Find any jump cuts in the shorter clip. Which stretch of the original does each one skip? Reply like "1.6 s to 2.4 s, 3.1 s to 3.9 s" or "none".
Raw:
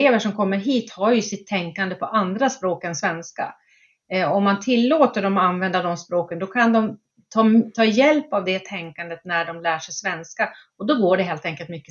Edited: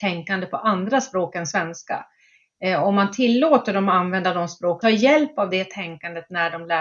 6.3 s to 7.8 s